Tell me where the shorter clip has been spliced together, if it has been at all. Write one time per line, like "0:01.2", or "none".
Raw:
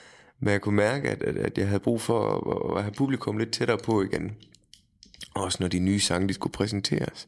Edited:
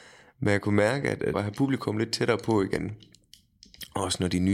0:01.3